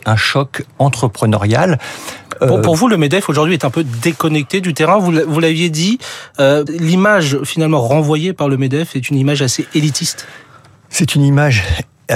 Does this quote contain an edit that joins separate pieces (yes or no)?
yes